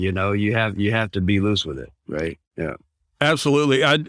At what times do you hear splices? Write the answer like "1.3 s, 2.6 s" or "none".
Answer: none